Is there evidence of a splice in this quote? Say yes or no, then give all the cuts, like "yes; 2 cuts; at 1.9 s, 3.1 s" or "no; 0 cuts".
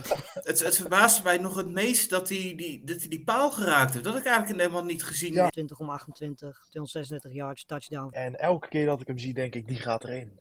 yes; 2 cuts; at 5.5 s, 8.1 s